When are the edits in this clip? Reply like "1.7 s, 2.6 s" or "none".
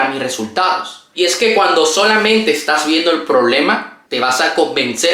1.1 s

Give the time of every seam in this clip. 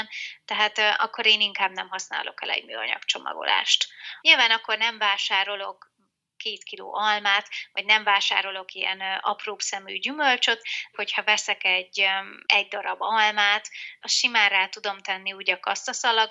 4.2 s, 10.9 s, 14.0 s

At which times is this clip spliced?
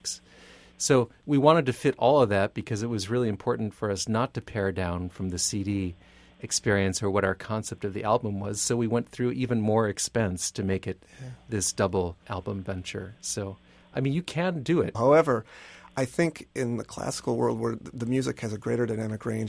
14.9 s

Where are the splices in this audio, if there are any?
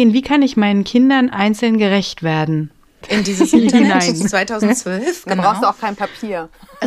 3.0 s

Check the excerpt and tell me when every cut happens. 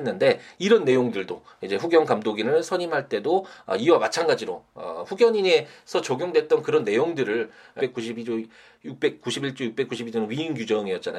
7.8 s

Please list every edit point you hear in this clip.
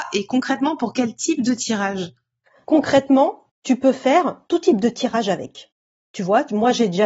2.6 s

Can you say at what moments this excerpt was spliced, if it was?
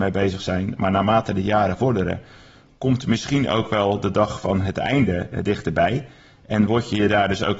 none

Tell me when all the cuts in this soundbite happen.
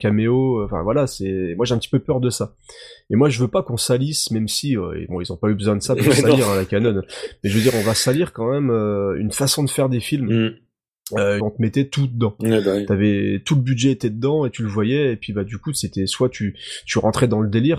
11.4 s

